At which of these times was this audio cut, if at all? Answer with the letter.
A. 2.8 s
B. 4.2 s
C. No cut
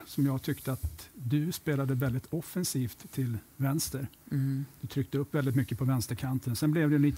C